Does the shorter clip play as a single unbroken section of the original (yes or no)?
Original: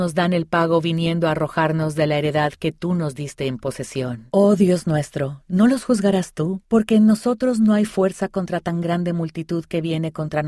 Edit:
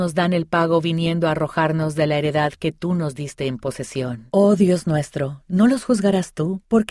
yes